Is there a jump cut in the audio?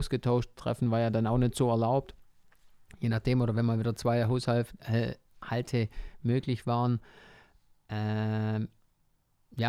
no; 0 cuts

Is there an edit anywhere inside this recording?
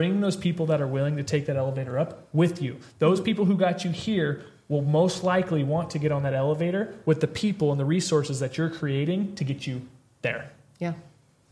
no; 0 cuts

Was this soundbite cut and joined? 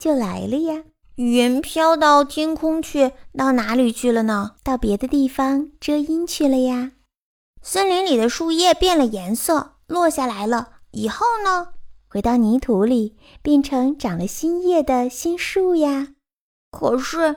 yes; 2 cuts; at 1.0 s, 4.6 s

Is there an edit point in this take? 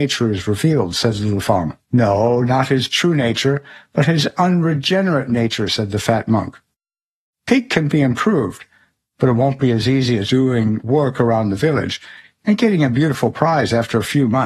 yes; 2 cuts; at 1.8 s, 10.3 s

